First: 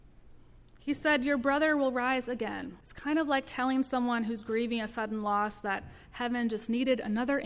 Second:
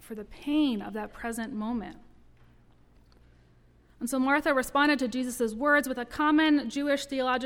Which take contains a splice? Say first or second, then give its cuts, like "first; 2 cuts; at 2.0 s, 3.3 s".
first; 1 cut; at 2.8 s